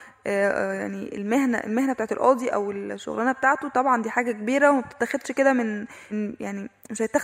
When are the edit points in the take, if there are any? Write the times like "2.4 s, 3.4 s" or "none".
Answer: 6.1 s